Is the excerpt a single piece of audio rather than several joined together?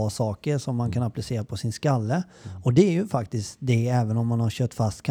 yes; 0 cuts

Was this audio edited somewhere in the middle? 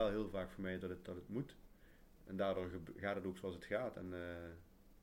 no; 0 cuts

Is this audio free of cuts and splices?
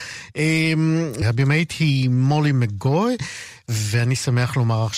no; 1 cut; at 1.2 s

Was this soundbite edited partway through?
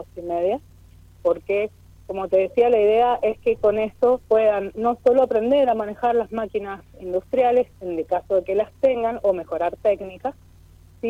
yes; 3 cuts; at 1.1 s, 4.2 s, 7.7 s

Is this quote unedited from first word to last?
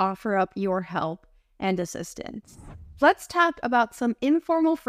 yes; 0 cuts

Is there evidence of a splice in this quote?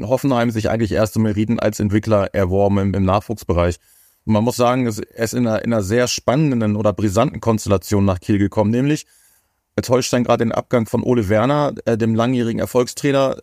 no; 0 cuts

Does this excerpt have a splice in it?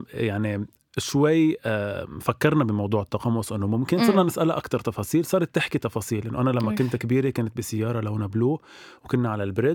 no; 0 cuts

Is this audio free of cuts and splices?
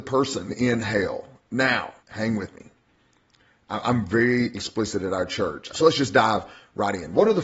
no; 2 cuts; at 2.0 s, 5.7 s

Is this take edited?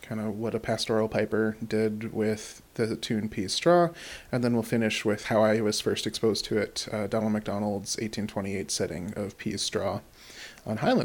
no; 0 cuts

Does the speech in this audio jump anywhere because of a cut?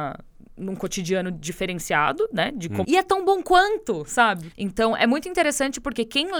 yes; 2 cuts; at 2.8 s, 4.5 s

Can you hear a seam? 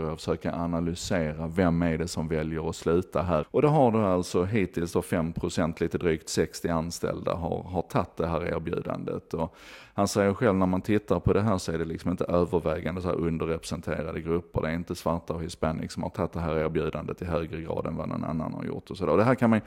yes; 1 cut; at 3.4 s

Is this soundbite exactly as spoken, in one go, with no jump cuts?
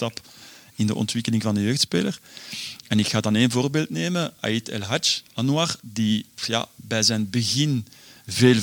yes; 0 cuts

